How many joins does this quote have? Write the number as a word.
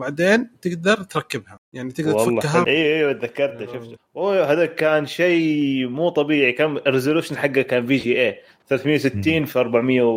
one